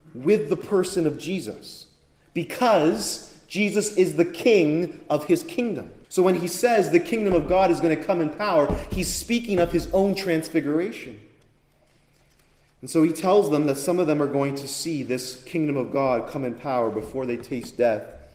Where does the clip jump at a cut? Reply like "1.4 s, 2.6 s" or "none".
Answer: 6.0 s